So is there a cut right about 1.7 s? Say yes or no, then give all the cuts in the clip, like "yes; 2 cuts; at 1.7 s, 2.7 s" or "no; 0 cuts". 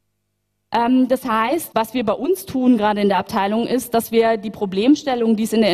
yes; 1 cut; at 1.7 s